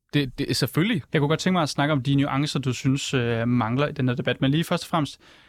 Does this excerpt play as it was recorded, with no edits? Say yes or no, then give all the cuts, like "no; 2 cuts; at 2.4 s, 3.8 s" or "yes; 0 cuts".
no; 1 cut; at 1.1 s